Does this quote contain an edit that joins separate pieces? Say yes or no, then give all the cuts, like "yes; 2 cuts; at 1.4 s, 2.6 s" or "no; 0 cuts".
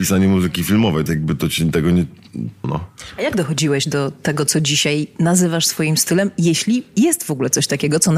yes; 2 cuts; at 1.1 s, 2.6 s